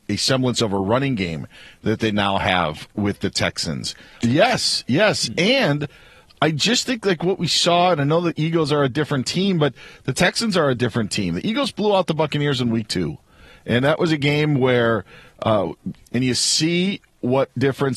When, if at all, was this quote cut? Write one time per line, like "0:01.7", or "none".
0:04.2
0:16.0